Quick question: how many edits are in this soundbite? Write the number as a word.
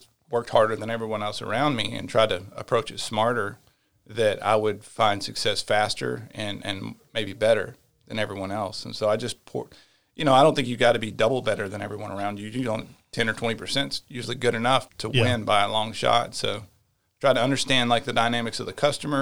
one